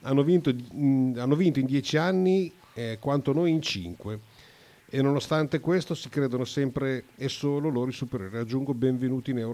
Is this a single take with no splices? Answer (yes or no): yes